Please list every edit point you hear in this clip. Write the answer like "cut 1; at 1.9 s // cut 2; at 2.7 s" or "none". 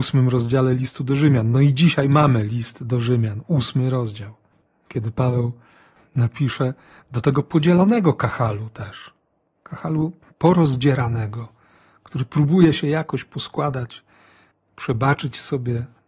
none